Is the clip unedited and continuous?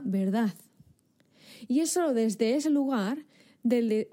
no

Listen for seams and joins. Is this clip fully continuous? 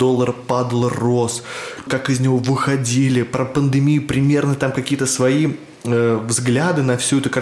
no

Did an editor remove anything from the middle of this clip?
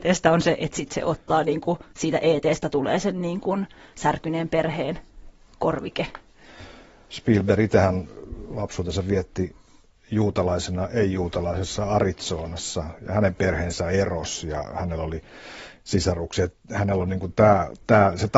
no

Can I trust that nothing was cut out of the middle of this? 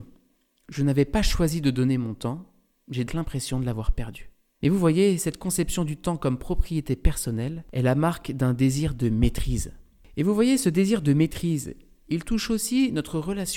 no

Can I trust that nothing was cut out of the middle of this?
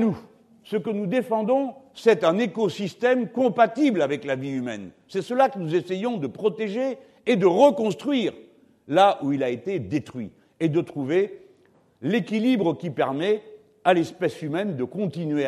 yes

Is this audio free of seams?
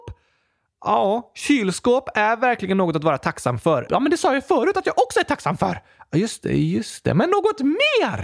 no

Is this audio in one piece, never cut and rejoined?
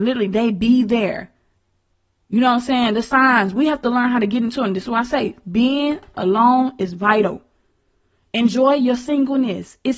yes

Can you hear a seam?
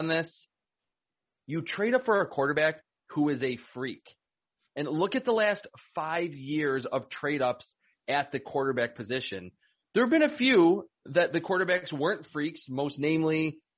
no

